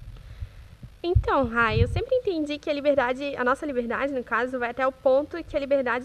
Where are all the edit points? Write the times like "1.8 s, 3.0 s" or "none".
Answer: none